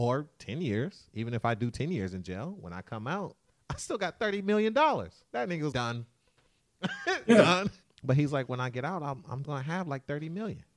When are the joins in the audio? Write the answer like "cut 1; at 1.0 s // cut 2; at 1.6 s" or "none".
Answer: cut 1; at 5.7 s // cut 2; at 7.8 s // cut 3; at 9.4 s